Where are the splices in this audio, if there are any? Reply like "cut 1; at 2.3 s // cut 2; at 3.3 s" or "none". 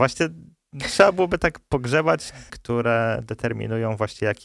cut 1; at 2.5 s